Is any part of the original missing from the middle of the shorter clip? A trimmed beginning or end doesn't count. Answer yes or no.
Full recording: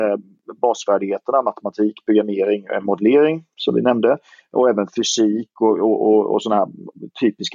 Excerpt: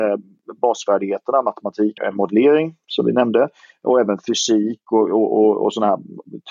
yes